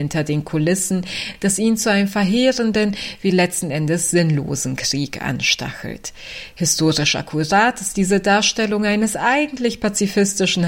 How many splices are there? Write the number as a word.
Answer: zero